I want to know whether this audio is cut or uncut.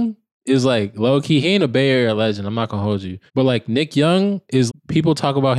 cut